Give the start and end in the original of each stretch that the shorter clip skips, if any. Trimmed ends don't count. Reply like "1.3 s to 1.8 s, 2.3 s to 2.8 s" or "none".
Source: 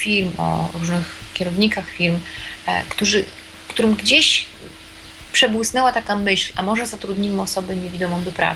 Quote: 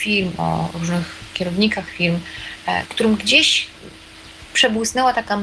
2.9 s to 3.6 s